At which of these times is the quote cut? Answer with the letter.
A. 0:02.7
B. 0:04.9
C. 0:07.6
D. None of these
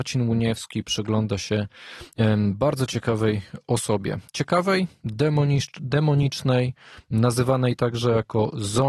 D